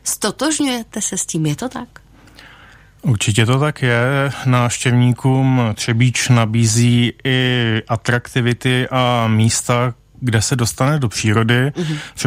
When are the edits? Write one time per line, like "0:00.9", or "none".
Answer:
none